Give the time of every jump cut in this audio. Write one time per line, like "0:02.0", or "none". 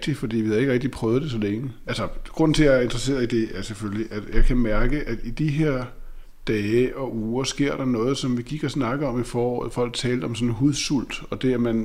0:01.8